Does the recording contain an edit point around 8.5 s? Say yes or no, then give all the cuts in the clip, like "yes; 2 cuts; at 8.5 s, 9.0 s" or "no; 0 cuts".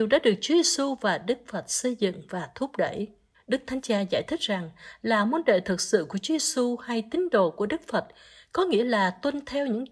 no; 1 cut; at 3.3 s